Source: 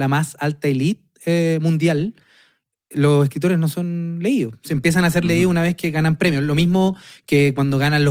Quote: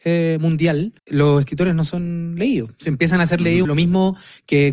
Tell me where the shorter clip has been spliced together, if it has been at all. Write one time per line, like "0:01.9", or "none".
0:01.0
0:03.6